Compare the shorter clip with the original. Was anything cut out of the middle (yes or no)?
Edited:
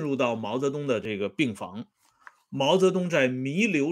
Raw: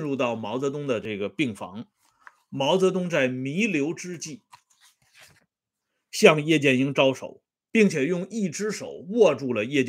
no